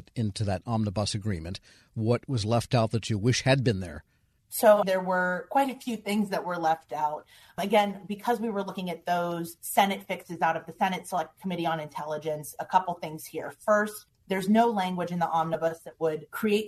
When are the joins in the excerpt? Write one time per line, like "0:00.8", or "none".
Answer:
0:04.8